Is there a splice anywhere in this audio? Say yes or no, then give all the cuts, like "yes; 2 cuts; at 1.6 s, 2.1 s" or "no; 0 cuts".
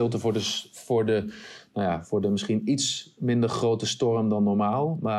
no; 0 cuts